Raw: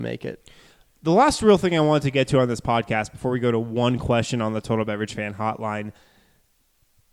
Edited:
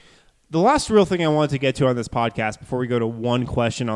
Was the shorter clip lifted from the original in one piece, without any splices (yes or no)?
yes